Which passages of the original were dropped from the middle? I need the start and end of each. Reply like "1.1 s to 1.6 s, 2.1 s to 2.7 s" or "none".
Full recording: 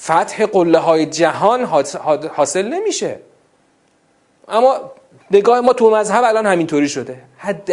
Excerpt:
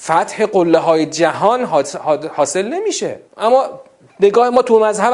3.3 s to 4.4 s